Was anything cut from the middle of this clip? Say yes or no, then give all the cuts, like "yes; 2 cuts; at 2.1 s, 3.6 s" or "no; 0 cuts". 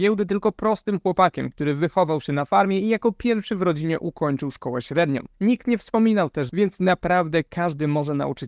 yes; 2 cuts; at 5.3 s, 6.5 s